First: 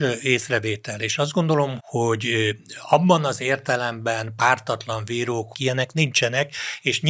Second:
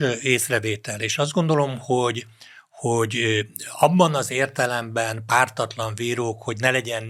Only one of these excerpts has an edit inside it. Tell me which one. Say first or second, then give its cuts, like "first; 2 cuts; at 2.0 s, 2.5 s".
first; 2 cuts; at 1.8 s, 5.5 s